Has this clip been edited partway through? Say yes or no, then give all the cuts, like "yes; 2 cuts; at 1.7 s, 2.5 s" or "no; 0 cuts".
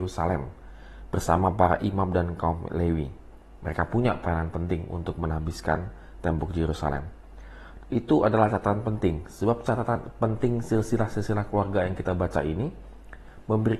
yes; 2 cuts; at 3.6 s, 7.8 s